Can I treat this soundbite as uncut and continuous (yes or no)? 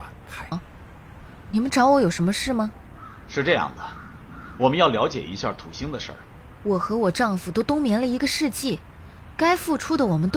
no